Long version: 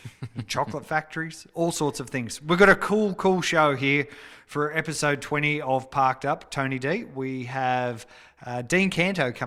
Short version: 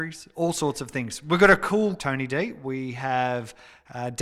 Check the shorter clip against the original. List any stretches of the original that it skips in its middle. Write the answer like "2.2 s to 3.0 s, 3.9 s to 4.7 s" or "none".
3.2 s to 6.5 s